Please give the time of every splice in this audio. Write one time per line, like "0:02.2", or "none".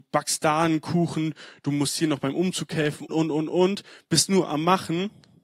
0:03.1